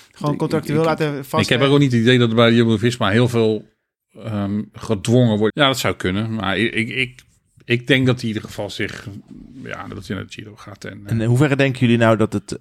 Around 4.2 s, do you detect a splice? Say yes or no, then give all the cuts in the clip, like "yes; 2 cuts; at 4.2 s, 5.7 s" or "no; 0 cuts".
no; 2 cuts; at 5.5 s, 9.9 s